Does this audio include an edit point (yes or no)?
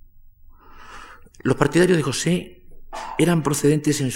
yes